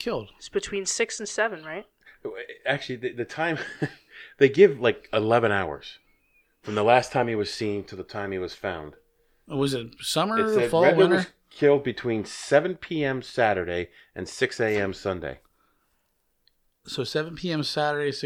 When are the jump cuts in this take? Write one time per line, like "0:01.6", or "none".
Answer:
none